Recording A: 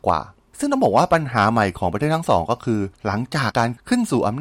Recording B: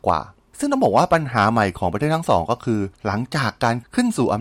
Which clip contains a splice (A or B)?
A